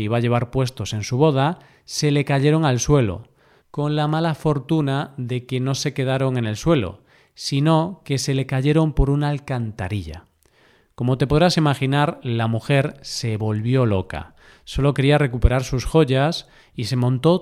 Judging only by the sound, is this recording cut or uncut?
uncut